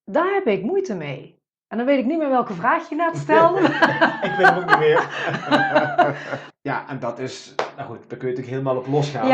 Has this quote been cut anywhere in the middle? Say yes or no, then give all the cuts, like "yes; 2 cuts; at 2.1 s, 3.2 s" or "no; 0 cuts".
yes; 1 cut; at 6.5 s